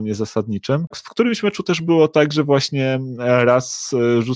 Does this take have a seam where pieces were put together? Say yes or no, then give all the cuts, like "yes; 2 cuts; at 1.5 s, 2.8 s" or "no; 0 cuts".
yes; 1 cut; at 0.9 s